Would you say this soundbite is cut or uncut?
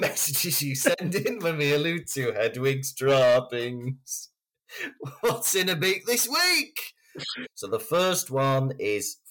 cut